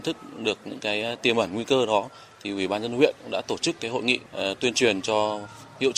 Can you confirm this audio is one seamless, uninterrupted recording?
no; 1 cut; at 4.3 s

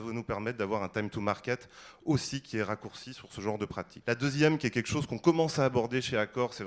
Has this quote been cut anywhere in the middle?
yes; 1 cut; at 4.0 s

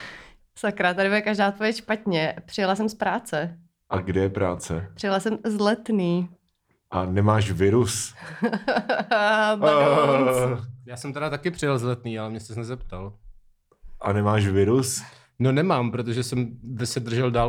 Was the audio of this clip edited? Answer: no; 0 cuts

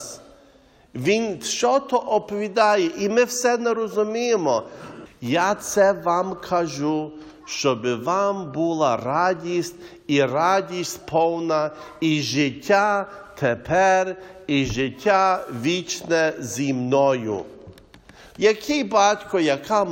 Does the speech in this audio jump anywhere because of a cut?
yes; 2 cuts; at 5.1 s, 18.3 s

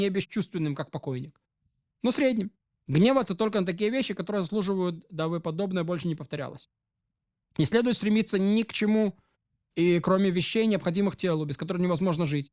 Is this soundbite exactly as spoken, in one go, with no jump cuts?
yes; 0 cuts

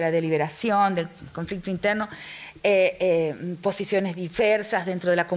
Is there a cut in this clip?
no; 0 cuts

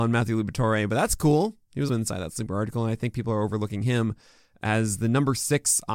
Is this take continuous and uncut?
no; 1 cut; at 1.9 s

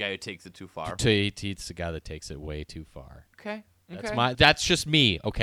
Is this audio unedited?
no; 2 cuts; at 3.3 s, 4.3 s

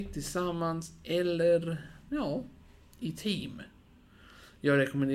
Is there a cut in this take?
no; 0 cuts

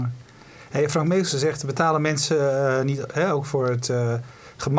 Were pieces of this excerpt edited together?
no; 0 cuts

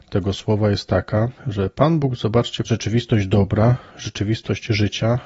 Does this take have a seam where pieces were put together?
yes; 2 cuts; at 1.4 s, 2.6 s

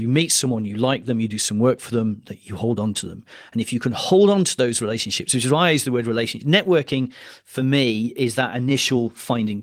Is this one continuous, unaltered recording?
yes; 0 cuts

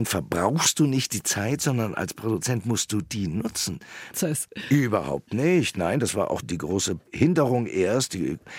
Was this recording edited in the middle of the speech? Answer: yes; 1 cut; at 4.1 s

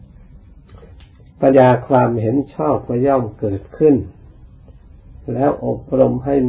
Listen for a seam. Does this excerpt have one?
yes; 1 cut; at 1.5 s

